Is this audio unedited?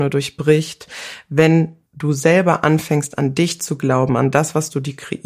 no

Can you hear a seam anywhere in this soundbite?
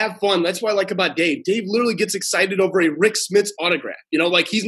no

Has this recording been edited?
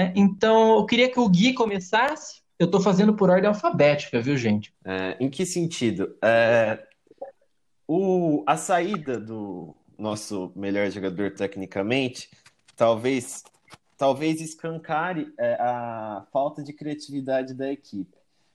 yes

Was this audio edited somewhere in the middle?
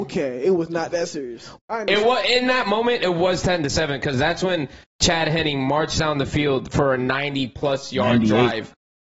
yes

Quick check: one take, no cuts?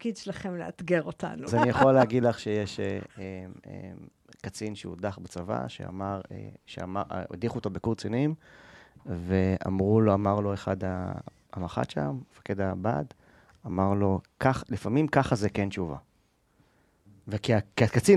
no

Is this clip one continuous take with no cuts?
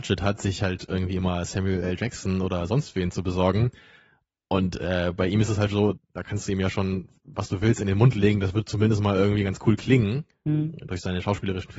no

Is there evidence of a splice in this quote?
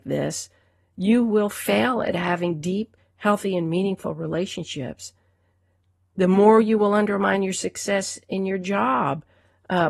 no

